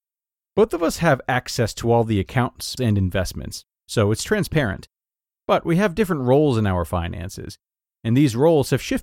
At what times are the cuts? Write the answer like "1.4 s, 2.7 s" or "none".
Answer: 2.8 s